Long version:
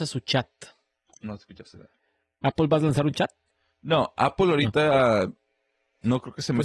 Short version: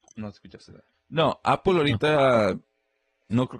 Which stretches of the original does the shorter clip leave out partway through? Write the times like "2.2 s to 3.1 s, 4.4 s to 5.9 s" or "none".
2.0 s to 3.7 s